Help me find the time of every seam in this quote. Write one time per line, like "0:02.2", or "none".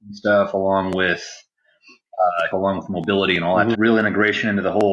0:02.5
0:03.7